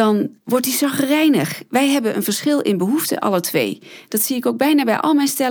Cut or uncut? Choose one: uncut